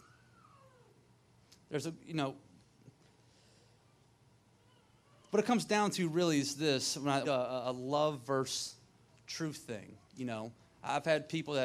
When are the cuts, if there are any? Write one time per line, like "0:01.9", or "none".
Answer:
0:07.2
0:10.0